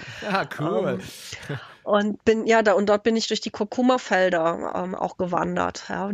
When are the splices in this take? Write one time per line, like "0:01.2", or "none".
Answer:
none